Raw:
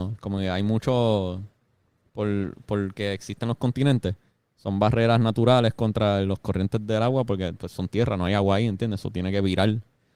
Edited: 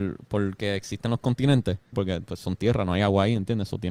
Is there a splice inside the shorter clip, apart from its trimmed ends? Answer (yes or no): yes